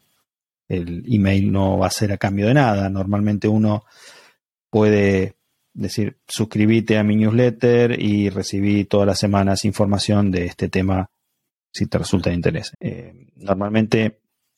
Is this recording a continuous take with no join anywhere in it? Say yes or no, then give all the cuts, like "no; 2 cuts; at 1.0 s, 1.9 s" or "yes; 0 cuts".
no; 1 cut; at 12.7 s